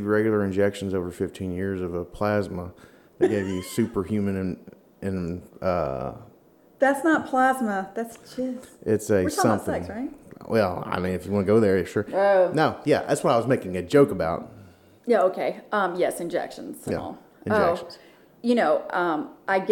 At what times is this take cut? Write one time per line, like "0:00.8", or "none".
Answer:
none